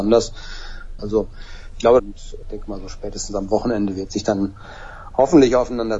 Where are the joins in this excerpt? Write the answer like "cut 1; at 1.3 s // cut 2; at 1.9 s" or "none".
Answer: cut 1; at 1.0 s // cut 2; at 2.0 s